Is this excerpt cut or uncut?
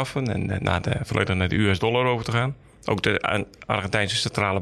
uncut